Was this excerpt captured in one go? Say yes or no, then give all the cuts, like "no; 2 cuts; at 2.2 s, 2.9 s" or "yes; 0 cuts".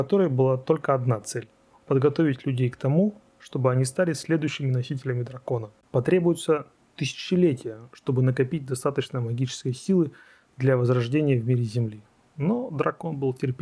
yes; 0 cuts